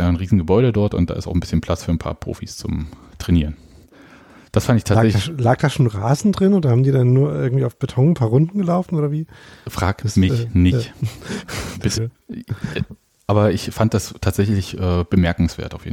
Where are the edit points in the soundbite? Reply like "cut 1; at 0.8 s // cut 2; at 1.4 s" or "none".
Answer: cut 1; at 11.9 s